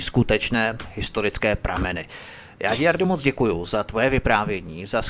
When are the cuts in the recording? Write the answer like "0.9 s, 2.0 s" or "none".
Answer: none